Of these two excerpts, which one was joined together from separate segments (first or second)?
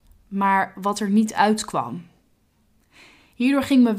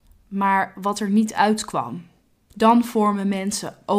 second